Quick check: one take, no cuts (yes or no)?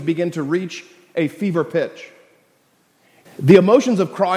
no